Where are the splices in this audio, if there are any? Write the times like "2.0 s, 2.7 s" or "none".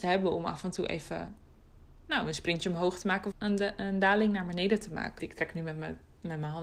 3.3 s, 5.2 s